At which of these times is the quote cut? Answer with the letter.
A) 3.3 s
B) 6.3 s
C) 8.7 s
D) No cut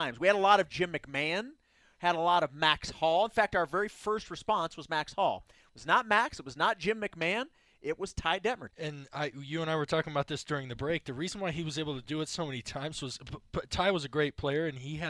C